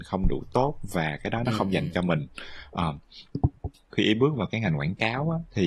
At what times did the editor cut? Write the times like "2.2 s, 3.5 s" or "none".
3.9 s